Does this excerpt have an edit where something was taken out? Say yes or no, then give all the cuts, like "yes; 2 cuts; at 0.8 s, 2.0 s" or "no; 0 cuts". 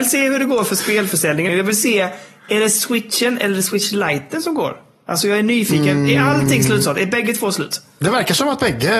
yes; 1 cut; at 1.5 s